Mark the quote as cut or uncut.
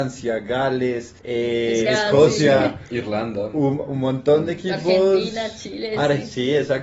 cut